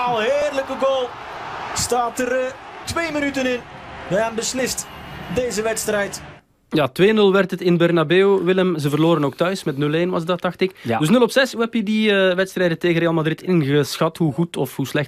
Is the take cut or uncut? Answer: cut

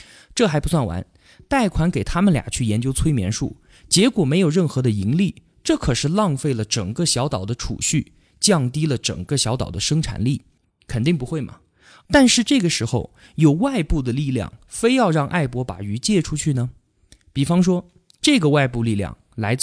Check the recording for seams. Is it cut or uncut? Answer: cut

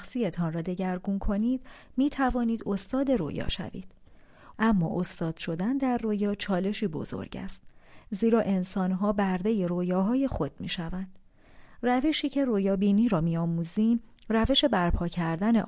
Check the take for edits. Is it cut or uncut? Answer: cut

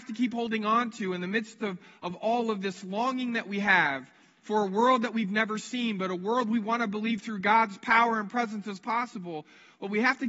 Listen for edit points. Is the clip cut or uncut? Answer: uncut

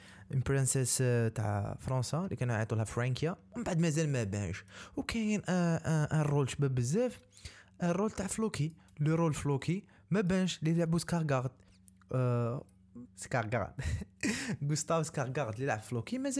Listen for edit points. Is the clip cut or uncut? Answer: cut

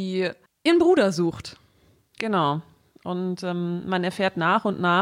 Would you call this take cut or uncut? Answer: uncut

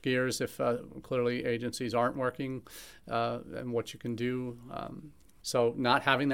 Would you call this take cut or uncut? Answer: cut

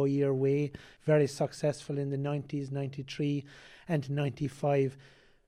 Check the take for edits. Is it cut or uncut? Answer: uncut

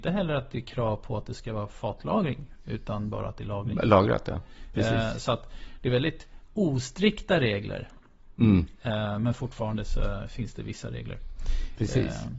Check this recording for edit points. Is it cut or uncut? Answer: uncut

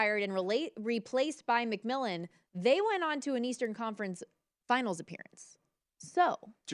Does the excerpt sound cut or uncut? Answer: uncut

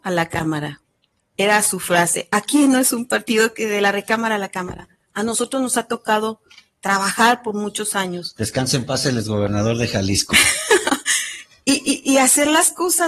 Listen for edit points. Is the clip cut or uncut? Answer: uncut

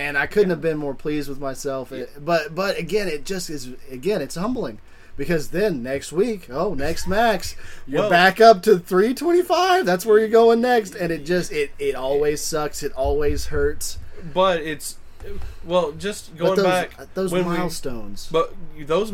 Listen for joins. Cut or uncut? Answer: uncut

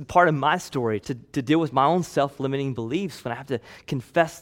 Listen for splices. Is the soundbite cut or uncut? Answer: cut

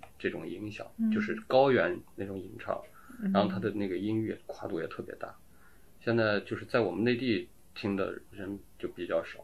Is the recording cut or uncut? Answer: uncut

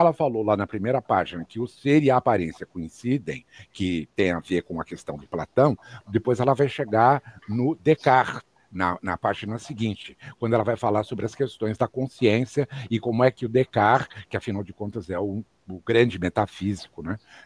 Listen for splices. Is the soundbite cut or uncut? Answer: uncut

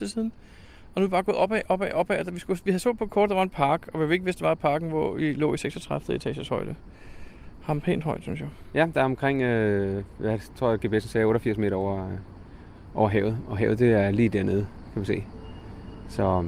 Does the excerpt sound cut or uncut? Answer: uncut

